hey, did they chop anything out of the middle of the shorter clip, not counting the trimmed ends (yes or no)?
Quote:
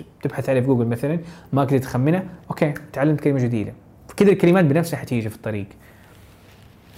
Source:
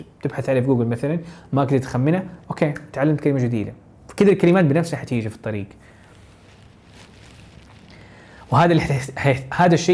no